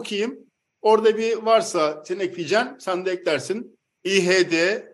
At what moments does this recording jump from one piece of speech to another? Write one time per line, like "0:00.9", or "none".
0:04.0